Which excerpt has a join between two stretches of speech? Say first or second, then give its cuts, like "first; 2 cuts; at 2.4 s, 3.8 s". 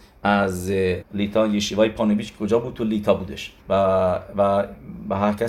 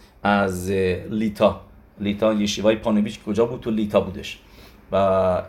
first; 2 cuts; at 1.0 s, 3.6 s